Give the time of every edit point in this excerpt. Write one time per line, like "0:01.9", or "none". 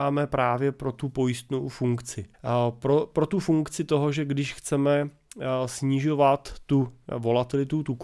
0:02.3